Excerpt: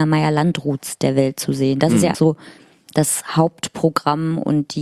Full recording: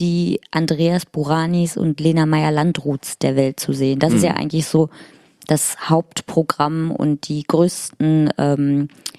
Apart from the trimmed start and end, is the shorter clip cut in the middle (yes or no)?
yes